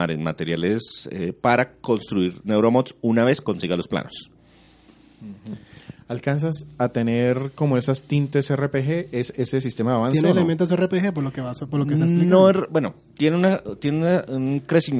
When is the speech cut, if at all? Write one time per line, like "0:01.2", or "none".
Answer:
none